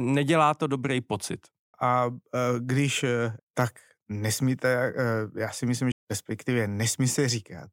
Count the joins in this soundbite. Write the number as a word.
three